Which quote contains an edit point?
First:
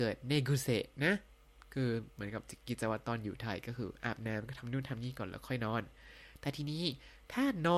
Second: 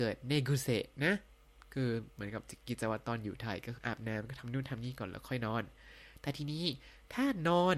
second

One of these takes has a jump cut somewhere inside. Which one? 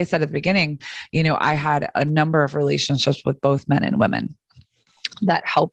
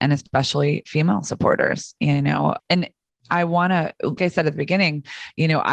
second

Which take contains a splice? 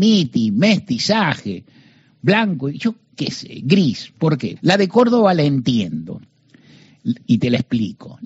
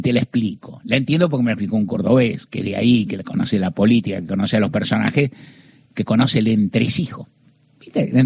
first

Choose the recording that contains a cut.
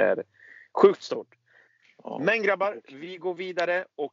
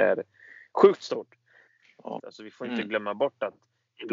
second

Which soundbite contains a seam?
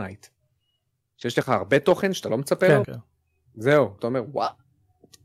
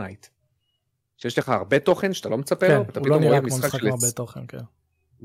first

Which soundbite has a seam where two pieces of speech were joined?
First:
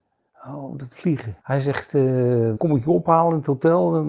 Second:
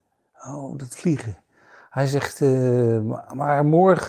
first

